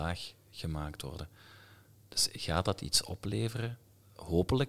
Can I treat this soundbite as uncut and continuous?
yes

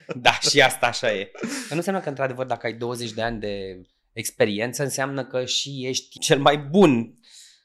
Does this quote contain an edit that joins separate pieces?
yes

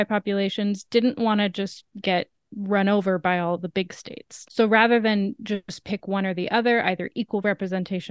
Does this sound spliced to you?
no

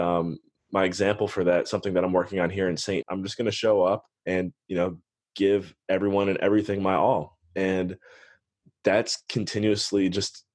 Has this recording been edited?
yes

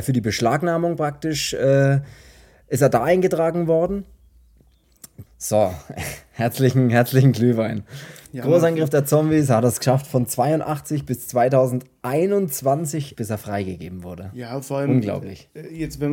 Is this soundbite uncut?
no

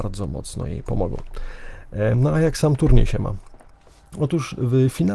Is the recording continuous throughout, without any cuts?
yes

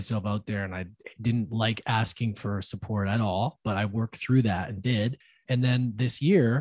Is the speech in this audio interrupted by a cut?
yes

